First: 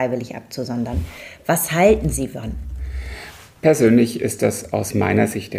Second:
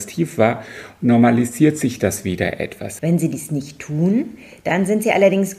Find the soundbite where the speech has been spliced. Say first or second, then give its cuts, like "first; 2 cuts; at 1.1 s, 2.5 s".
second; 1 cut; at 3.0 s